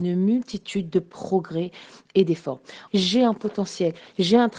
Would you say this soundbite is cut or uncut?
cut